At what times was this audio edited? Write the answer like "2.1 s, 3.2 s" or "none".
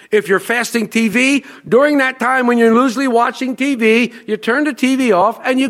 none